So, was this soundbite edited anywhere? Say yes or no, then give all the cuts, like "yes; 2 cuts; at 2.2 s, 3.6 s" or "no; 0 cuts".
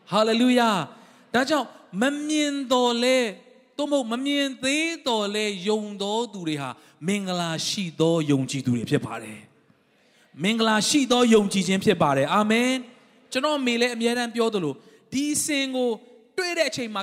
no; 0 cuts